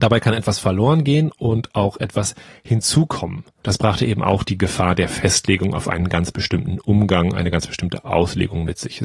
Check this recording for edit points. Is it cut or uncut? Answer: cut